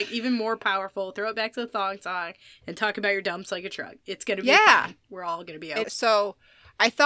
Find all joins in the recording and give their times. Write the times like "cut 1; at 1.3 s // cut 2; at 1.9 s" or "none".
cut 1; at 4.0 s // cut 2; at 5.8 s